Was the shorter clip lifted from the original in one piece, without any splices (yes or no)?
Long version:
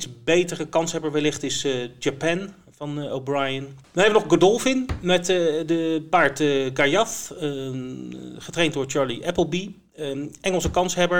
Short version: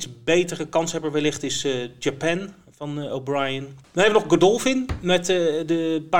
yes